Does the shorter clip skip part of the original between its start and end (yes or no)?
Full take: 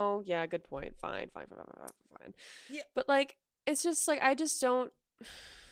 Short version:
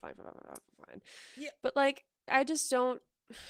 yes